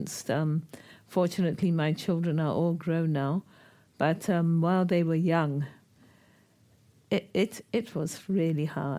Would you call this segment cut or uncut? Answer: uncut